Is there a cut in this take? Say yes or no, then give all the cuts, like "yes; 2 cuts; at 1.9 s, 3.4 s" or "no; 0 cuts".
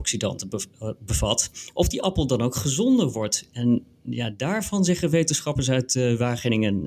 no; 0 cuts